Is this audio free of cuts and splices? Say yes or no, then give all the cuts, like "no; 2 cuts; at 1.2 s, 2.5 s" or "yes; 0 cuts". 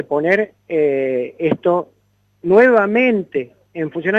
yes; 0 cuts